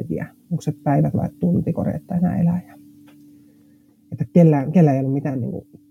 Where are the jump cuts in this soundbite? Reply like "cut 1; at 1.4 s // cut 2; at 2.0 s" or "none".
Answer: none